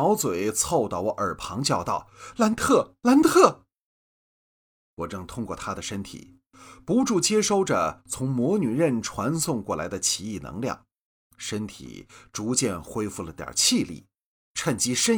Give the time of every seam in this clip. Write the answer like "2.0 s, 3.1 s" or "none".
none

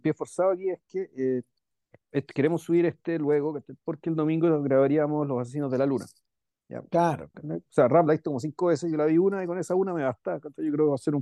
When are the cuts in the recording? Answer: 7.3 s

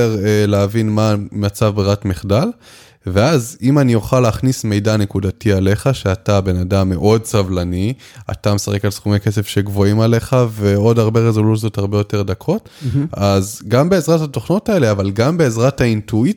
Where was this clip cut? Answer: none

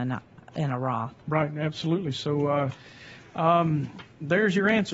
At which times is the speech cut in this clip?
none

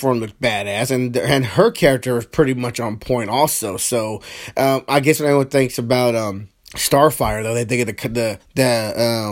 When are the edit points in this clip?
6.6 s, 8.4 s

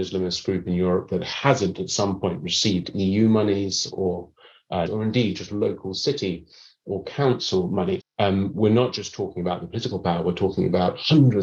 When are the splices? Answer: 4.9 s, 8.0 s

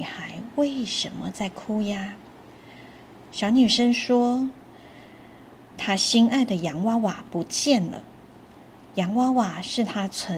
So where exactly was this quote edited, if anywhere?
none

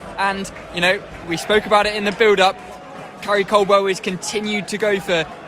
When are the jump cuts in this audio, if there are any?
1.2 s

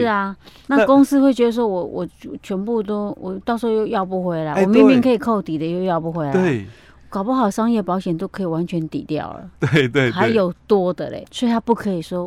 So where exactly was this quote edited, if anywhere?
11.2 s

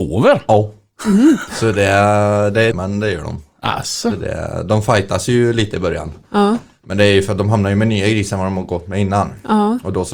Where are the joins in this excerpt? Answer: 2.7 s

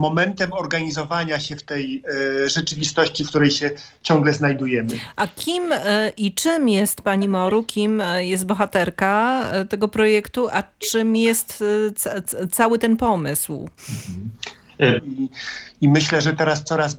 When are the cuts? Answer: 13.8 s, 15.0 s

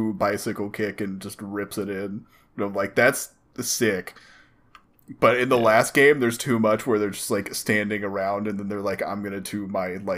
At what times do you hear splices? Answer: none

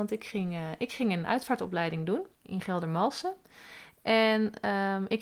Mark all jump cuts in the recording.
2.3 s

